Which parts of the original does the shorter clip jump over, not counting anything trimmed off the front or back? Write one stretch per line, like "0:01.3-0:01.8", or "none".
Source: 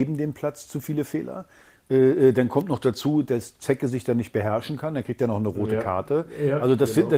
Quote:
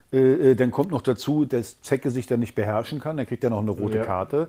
none